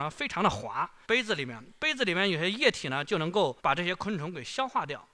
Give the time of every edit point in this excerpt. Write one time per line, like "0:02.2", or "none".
0:01.0
0:03.6